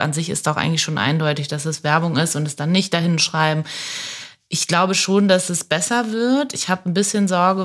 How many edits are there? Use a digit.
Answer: 0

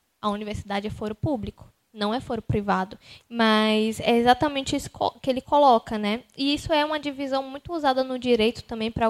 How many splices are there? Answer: 1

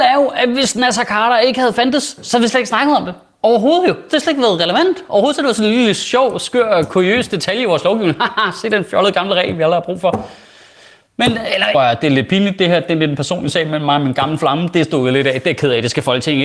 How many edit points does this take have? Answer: 1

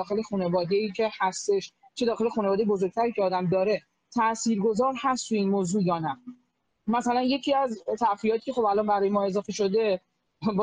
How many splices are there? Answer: 0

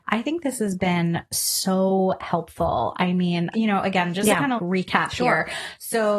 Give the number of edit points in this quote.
2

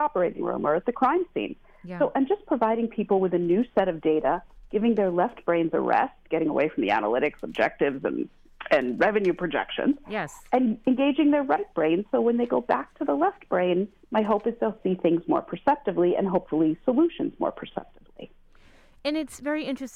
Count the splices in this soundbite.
0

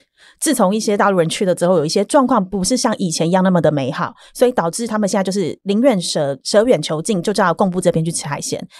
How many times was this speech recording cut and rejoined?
0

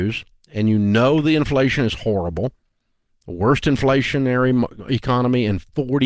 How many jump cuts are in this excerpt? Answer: 0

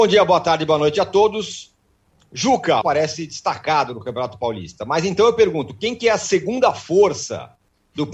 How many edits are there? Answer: 1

